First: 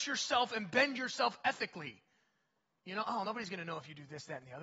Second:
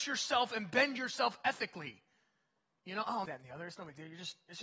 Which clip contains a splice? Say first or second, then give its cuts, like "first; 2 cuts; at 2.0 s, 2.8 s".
second; 1 cut; at 3.3 s